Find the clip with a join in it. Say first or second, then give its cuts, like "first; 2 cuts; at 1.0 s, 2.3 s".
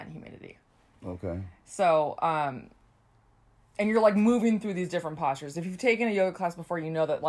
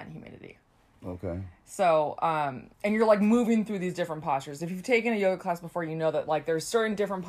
second; 1 cut; at 2.7 s